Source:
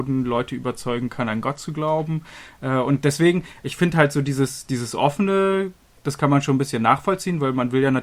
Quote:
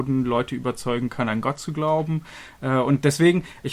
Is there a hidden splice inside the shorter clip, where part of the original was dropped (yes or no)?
no